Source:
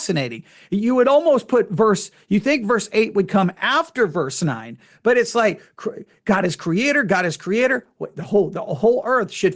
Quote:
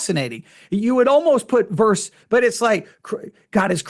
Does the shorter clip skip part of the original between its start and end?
yes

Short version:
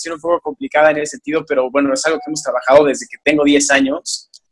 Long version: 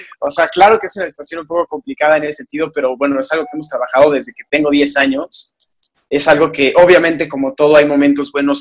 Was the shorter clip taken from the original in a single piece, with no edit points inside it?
yes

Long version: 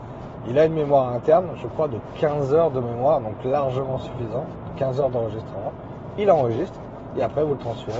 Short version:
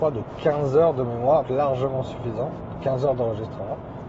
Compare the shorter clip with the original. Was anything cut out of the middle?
yes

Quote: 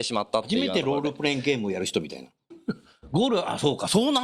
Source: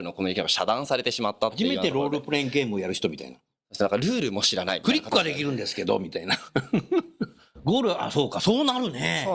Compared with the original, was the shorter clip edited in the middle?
yes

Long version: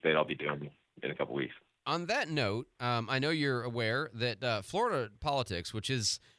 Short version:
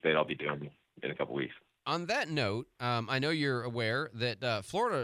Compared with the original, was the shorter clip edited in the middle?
no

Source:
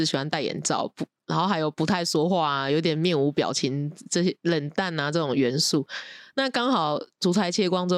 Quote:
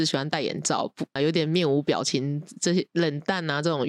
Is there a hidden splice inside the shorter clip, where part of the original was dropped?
yes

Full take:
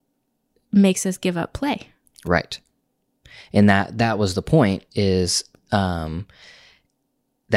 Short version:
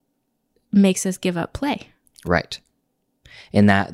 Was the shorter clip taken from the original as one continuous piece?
yes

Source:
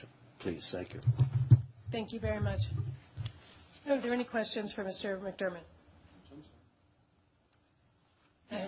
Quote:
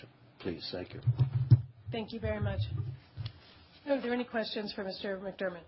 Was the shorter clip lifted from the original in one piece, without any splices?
yes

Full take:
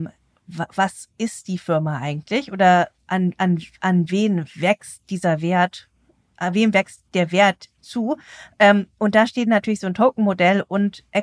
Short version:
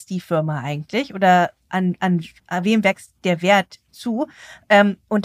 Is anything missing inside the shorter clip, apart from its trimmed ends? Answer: yes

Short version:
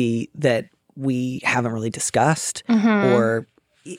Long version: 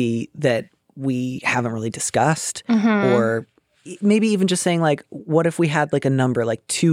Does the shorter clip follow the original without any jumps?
yes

